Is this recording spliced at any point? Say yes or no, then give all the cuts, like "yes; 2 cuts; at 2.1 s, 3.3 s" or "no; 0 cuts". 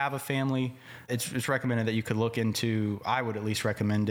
yes; 1 cut; at 1.1 s